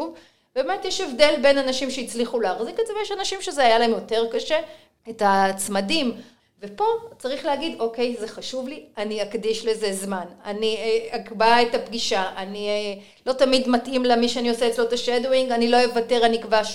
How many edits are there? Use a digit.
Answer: 2